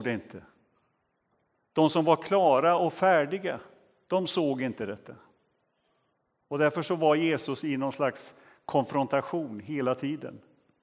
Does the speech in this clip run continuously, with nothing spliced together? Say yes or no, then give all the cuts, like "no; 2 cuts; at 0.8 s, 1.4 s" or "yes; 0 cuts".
yes; 0 cuts